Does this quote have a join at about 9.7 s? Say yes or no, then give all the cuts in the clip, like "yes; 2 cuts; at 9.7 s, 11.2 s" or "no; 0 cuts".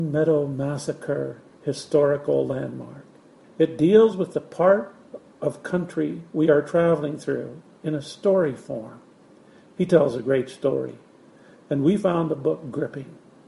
no; 1 cut; at 3.4 s